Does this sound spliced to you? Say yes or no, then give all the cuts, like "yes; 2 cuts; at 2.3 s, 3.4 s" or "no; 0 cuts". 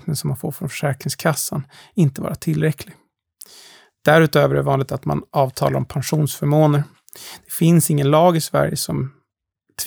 no; 0 cuts